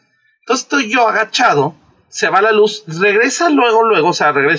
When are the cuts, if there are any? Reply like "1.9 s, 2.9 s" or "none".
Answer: none